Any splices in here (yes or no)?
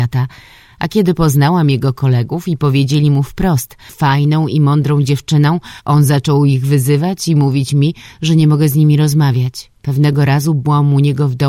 yes